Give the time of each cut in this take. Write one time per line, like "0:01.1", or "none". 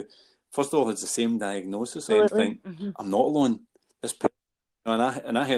0:02.1